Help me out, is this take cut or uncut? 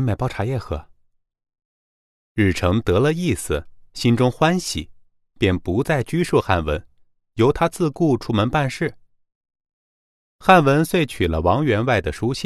uncut